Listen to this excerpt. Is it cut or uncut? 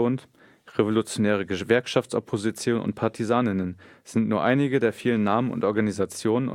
uncut